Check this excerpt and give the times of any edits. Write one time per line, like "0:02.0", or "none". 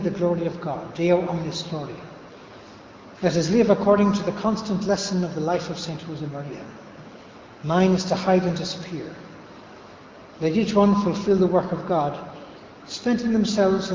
none